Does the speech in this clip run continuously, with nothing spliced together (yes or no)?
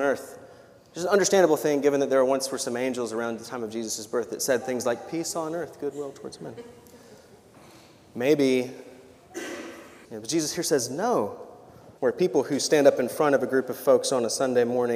no